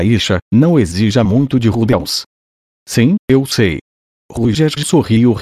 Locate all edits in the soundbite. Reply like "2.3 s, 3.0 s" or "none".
none